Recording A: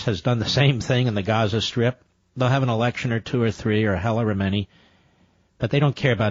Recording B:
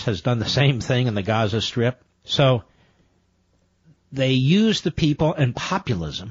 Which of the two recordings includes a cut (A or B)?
B